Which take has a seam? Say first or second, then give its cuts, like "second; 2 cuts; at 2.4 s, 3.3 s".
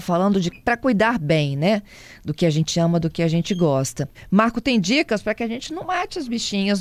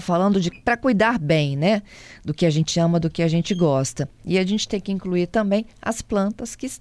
first; 1 cut; at 4.1 s